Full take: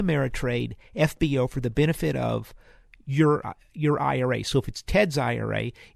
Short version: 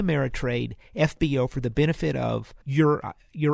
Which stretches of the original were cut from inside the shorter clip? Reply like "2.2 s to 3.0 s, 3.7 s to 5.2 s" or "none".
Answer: 2.6 s to 3.0 s